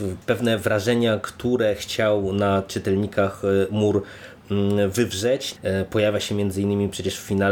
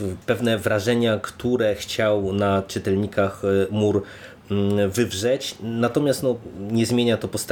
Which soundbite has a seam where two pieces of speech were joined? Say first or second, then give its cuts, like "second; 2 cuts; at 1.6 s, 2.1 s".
first; 1 cut; at 5.6 s